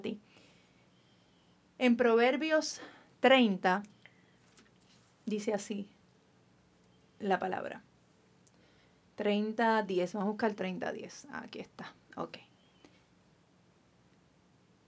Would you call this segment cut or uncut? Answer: uncut